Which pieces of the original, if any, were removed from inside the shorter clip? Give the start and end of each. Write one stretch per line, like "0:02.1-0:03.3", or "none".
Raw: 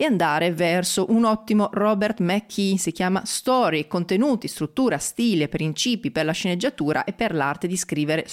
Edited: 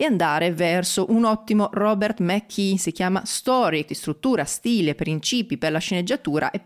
0:03.9-0:04.4